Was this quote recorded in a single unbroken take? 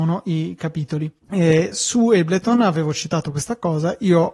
no; 1 cut; at 1.2 s

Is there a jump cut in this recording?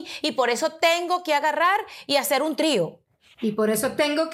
no; 0 cuts

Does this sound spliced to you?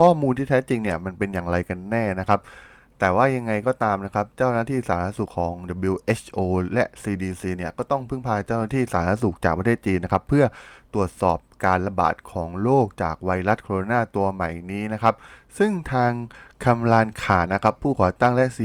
yes; 2 cuts; at 5.3 s, 17.5 s

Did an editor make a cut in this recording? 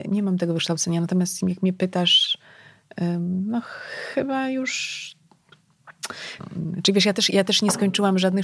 yes; 2 cuts; at 1.4 s, 6.4 s

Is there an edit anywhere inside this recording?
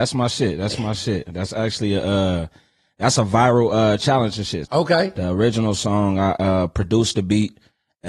yes; 1 cut; at 4.6 s

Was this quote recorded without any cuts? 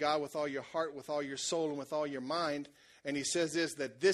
yes; 0 cuts

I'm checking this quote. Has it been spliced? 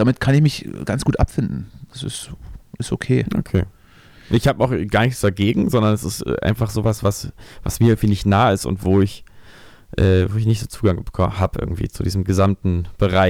no; 0 cuts

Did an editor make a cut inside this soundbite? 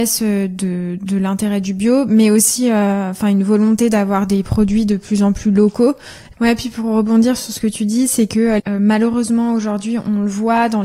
yes; 2 cuts; at 6.3 s, 8.6 s

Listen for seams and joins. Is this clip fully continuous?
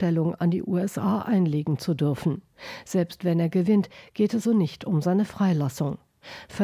no; 1 cut; at 4.4 s

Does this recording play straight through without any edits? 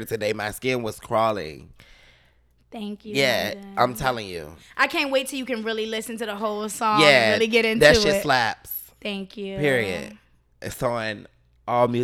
yes; 0 cuts

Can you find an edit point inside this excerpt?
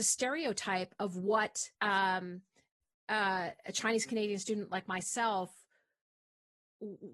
yes; 1 cut; at 1.7 s

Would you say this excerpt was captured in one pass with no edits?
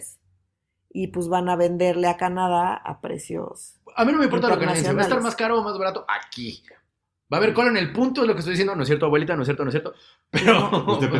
yes; 0 cuts

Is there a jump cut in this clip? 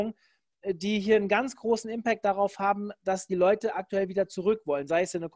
no; 0 cuts

